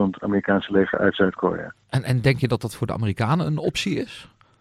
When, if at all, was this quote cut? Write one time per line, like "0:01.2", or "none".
none